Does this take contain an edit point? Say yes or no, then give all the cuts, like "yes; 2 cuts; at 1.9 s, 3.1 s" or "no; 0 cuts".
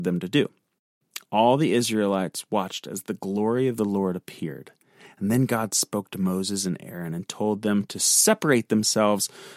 no; 0 cuts